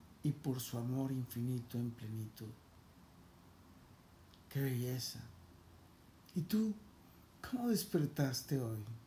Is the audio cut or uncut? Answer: uncut